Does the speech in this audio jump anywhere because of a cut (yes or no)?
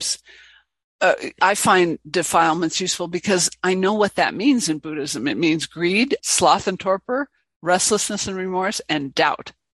yes